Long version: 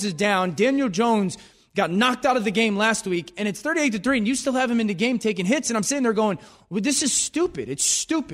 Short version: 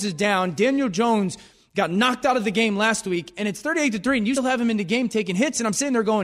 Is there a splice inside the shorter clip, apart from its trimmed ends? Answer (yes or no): yes